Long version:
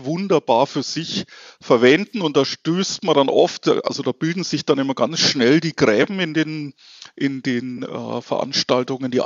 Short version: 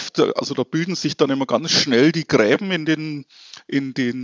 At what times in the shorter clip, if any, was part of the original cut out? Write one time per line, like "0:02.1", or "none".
none